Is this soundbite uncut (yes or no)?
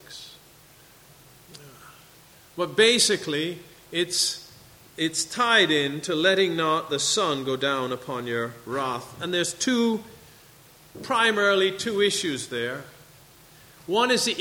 yes